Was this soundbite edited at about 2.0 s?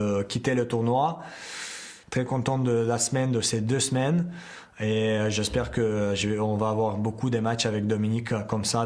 yes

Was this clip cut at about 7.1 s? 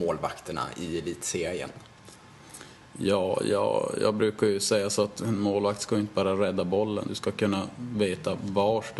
yes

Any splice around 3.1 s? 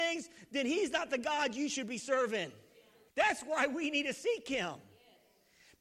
yes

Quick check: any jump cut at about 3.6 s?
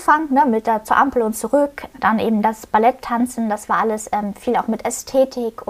no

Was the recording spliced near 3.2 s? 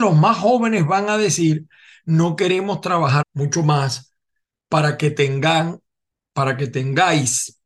yes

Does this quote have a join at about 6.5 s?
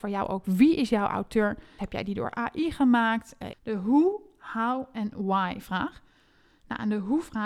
no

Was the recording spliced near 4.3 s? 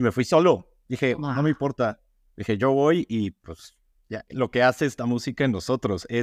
yes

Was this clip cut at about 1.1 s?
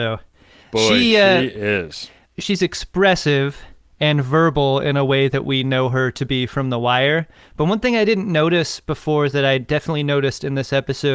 no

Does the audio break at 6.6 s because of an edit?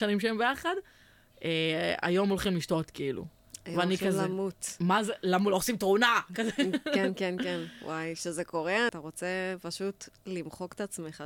no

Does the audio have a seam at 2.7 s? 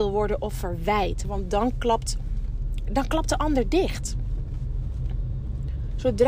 no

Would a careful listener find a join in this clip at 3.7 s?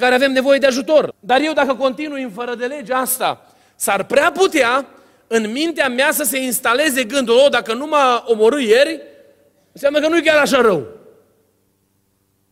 no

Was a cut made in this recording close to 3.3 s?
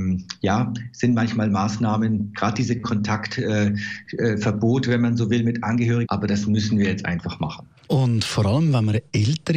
no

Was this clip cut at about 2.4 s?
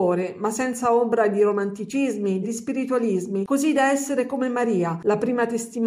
yes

